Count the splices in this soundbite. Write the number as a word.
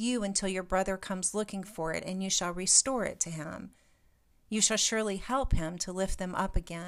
one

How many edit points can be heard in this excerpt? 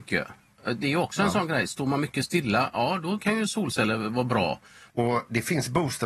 one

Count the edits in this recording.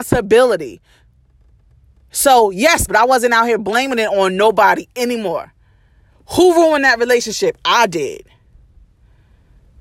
one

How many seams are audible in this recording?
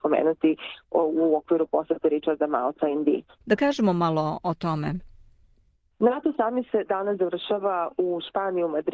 one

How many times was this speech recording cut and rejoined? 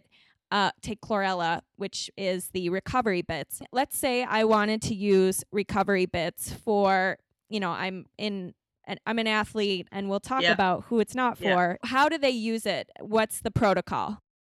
two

